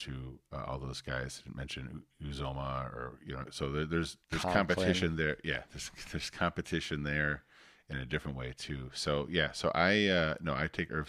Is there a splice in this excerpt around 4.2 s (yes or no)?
yes